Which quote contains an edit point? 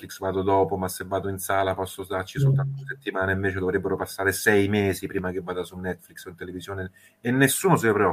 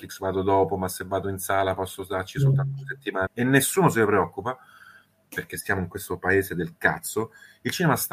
second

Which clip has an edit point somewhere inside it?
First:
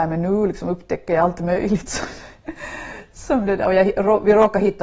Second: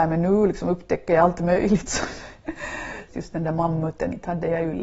second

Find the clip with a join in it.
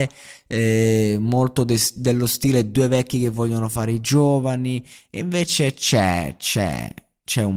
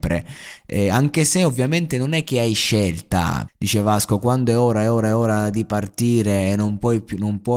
second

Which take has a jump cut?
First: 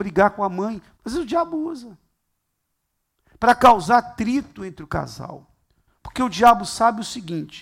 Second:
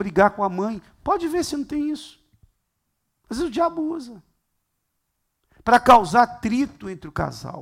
first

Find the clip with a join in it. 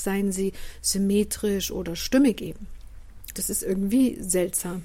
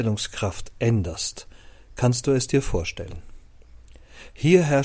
first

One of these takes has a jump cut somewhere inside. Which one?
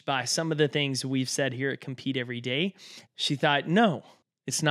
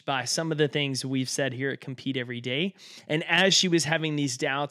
first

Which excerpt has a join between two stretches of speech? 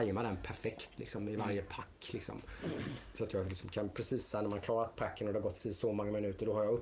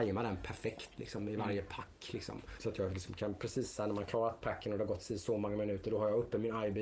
second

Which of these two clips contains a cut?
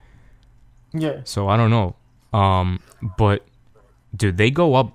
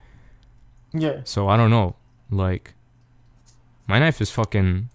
first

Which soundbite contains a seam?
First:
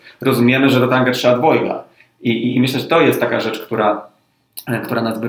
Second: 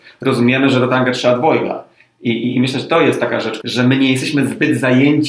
second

